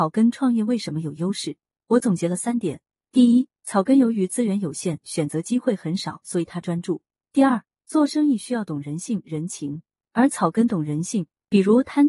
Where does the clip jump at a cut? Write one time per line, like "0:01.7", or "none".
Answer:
none